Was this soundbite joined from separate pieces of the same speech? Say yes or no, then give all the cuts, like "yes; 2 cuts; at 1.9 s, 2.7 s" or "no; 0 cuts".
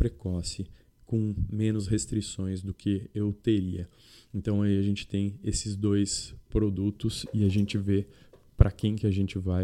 no; 0 cuts